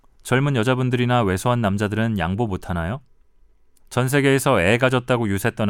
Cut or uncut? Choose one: cut